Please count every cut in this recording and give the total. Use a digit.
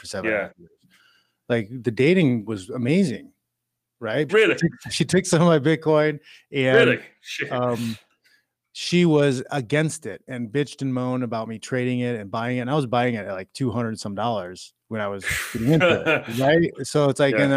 1